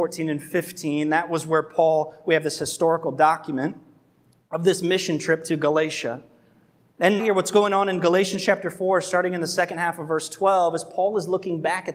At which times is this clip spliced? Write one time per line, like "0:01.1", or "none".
0:07.2